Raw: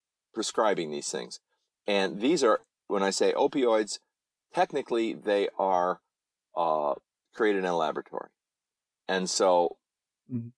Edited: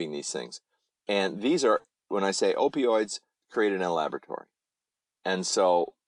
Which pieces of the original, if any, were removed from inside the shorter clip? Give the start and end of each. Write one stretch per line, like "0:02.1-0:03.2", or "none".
0:04.2-0:07.2